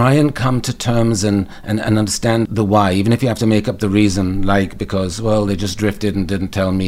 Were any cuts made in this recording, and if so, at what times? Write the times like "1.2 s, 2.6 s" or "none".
2.5 s